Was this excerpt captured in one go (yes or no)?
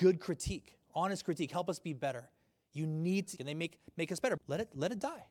no